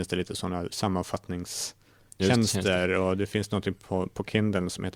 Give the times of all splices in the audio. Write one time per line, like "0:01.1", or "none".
none